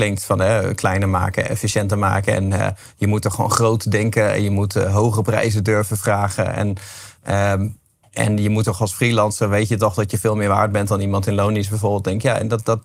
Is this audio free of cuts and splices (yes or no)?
yes